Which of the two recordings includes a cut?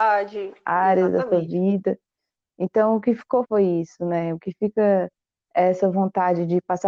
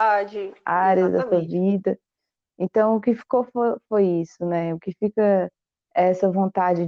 first; 1 cut; at 3.4 s

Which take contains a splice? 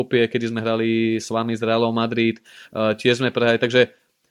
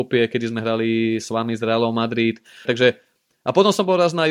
second; 1 cut; at 2.6 s

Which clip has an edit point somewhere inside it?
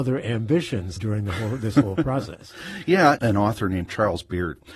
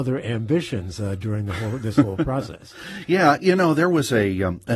first; 2 cuts; at 1.0 s, 3.2 s

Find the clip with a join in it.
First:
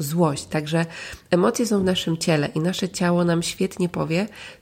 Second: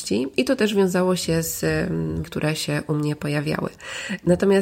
second; 1 cut; at 2.2 s

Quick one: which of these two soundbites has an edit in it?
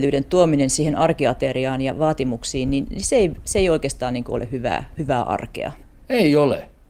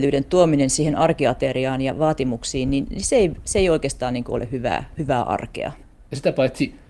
second; 1 cut; at 5.9 s

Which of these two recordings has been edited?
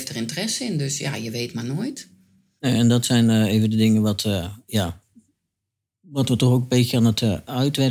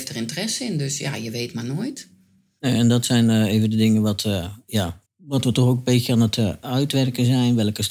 second; 1 cut; at 5.1 s

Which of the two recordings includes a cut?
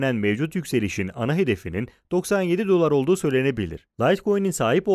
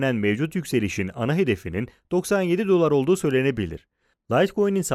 first; 1 cut; at 3.9 s

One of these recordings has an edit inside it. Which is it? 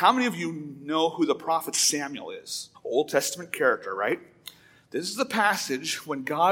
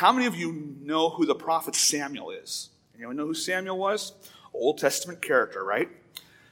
first; 1 cut; at 2.7 s

